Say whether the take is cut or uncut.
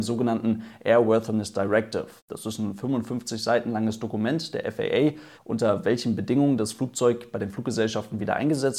cut